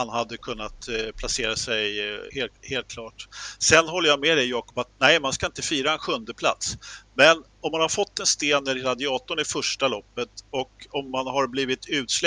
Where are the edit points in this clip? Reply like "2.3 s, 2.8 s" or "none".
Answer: 2.3 s